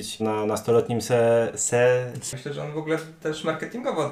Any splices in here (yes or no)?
yes